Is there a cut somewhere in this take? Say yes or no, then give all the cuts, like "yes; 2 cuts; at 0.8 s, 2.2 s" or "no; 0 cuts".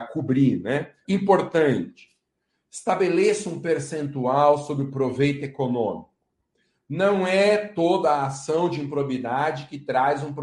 yes; 1 cut; at 1.0 s